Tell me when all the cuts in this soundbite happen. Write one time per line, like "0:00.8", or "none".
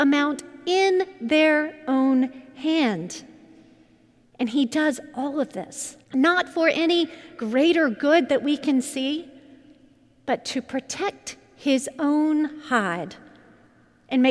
0:04.2
0:06.0